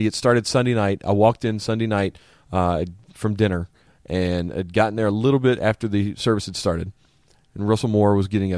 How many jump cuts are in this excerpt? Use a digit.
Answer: 0